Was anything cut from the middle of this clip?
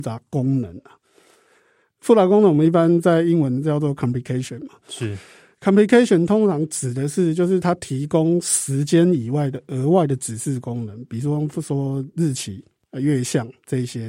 no; 0 cuts

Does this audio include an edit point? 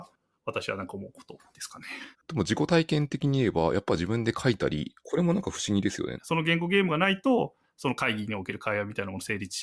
yes; 3 cuts; at 2.1 s, 5.0 s, 6.2 s

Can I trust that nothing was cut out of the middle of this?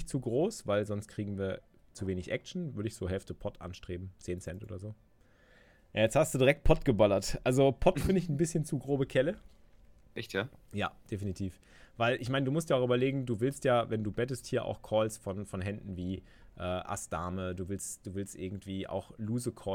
yes; 0 cuts

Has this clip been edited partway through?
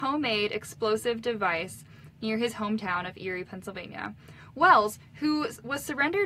no; 0 cuts

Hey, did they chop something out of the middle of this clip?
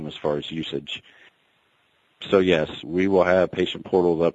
yes; 1 cut; at 2.8 s

